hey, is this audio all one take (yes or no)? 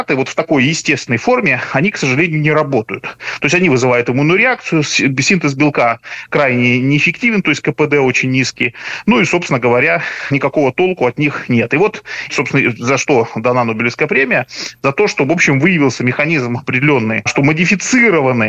yes